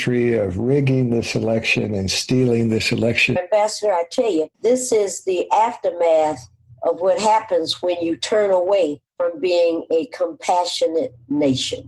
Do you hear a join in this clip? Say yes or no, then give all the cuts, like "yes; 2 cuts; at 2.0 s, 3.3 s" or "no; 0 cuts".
yes; 3 cuts; at 3.4 s, 4.5 s, 9.1 s